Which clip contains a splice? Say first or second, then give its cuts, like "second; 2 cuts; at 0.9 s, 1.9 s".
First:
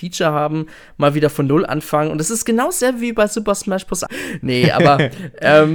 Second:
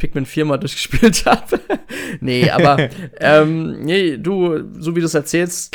first; 1 cut; at 4.1 s